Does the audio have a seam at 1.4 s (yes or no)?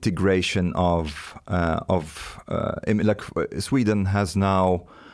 no